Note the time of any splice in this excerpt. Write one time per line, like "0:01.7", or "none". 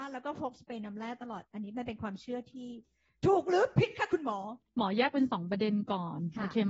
0:04.7